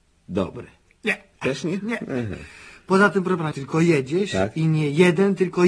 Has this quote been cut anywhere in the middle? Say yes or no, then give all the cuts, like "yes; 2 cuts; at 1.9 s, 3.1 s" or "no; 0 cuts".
yes; 1 cut; at 3.5 s